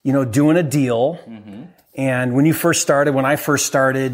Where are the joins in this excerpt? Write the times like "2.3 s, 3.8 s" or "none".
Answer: none